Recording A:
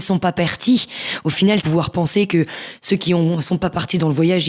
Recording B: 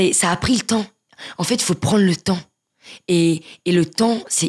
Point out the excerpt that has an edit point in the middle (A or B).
A